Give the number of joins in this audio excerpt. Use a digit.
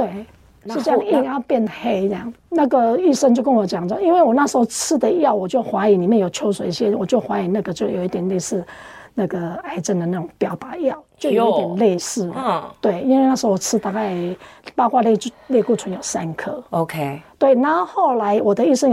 1